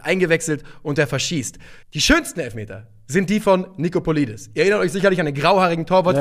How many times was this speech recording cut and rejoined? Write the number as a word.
one